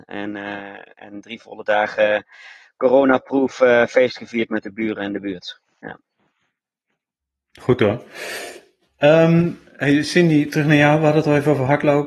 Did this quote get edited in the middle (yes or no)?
no